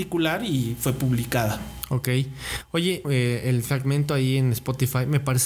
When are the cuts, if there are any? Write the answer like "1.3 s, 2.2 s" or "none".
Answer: 3.0 s